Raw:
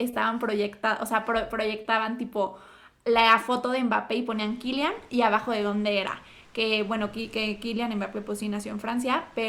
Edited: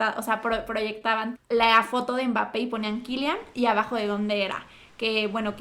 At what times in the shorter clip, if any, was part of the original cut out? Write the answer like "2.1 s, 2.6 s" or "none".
1.3 s

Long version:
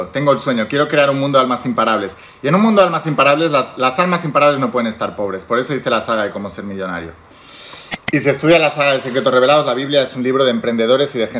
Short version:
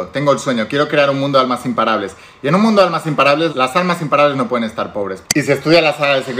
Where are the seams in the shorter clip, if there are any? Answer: 3.5 s, 5.2 s

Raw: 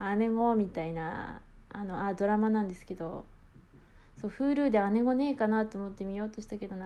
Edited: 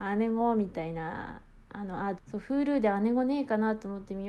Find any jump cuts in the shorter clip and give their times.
2.2 s

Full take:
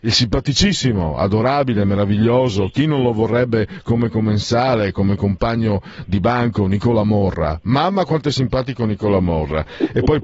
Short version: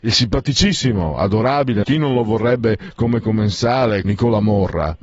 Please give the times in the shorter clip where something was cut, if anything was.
1.8 s, 4.0 s

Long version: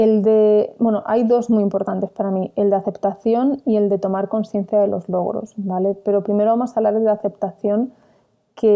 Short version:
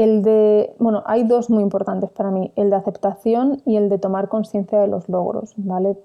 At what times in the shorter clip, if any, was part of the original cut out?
none

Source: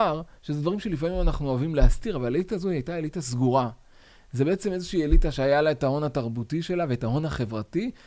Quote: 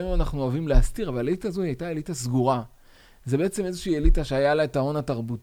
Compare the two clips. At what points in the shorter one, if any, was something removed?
none

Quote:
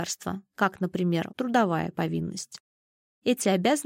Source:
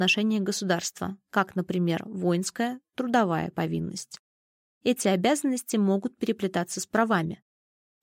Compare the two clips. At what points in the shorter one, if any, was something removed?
1.3 s

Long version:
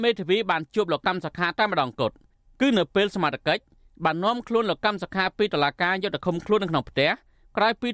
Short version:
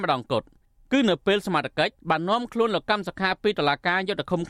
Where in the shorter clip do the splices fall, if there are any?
2.0 s

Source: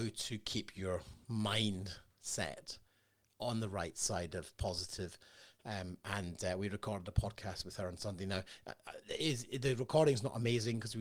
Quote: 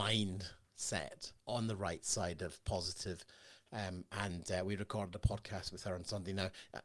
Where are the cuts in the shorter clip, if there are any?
1.4 s

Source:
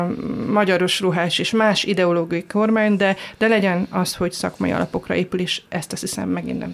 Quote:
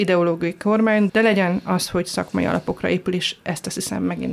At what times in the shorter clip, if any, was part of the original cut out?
1.1 s

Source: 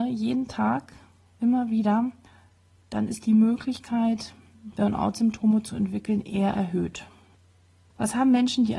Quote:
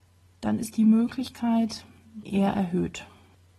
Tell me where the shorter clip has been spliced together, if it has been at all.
2.2 s

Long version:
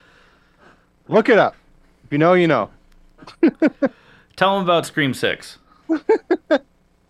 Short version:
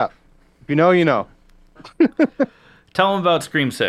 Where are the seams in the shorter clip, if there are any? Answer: none

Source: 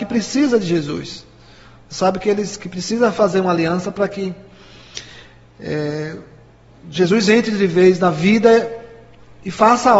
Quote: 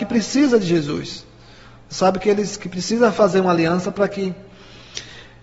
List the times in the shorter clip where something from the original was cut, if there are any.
none

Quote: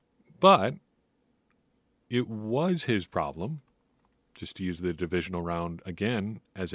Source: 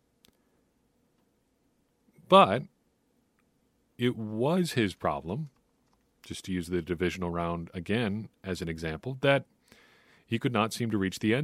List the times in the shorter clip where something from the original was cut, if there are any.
none

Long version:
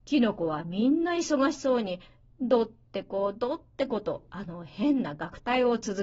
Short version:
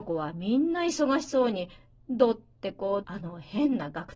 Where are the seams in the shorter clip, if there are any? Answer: 3.0 s

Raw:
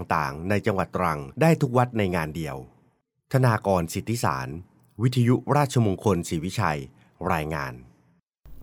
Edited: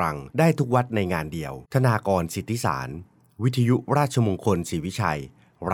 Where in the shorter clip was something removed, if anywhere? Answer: 1.6 s

